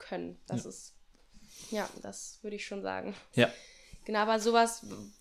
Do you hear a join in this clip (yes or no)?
yes